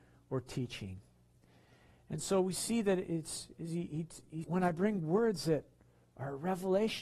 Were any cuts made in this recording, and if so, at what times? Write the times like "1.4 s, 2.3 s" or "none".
4.4 s